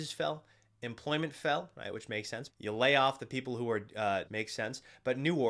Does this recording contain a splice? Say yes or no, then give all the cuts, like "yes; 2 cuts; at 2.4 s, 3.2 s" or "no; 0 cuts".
yes; 2 cuts; at 2.5 s, 4.3 s